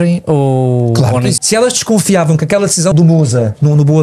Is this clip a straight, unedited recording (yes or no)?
no